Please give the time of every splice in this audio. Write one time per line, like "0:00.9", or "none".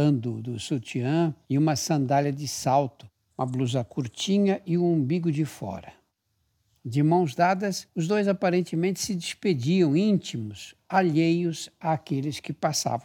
none